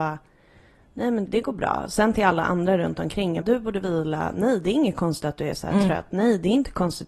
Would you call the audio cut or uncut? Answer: cut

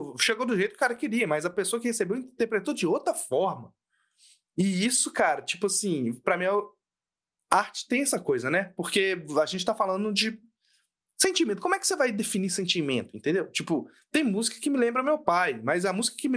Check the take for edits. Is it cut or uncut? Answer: uncut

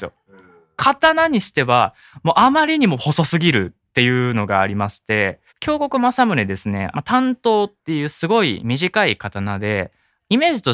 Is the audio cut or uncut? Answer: cut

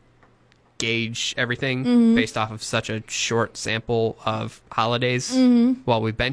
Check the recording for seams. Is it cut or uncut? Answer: uncut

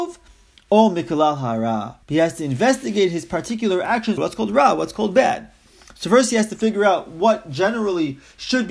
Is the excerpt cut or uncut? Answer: cut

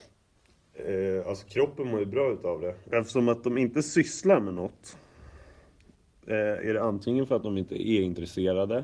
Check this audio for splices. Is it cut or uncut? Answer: cut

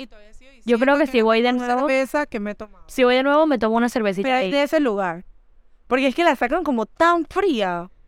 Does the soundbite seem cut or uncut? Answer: uncut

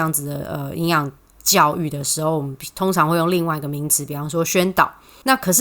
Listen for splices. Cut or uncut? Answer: uncut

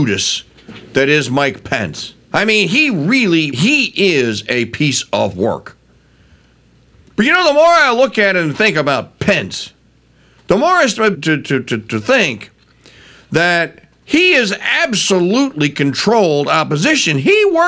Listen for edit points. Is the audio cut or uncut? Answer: cut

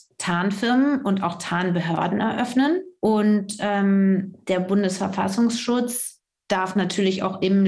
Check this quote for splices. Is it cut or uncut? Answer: uncut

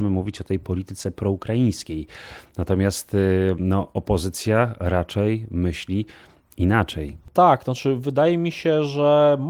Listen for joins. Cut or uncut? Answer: uncut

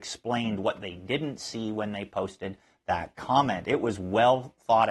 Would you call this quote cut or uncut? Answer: uncut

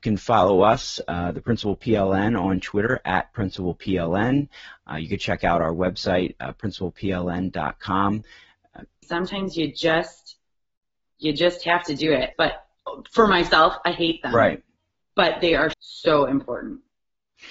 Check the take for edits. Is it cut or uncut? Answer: cut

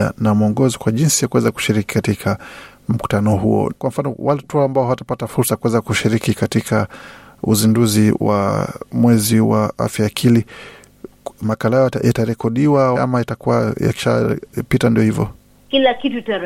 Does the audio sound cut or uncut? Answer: cut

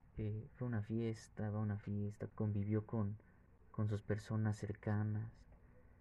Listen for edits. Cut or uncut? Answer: cut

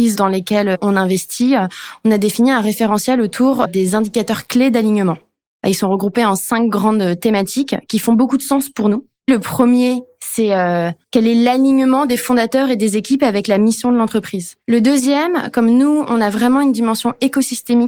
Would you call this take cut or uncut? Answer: cut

